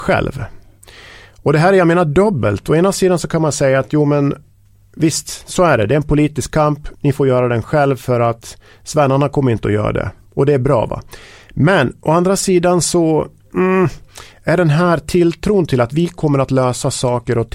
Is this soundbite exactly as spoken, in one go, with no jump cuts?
yes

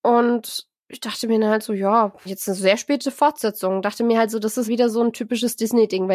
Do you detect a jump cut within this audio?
yes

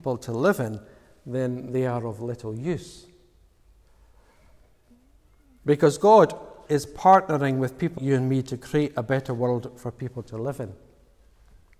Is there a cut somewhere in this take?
yes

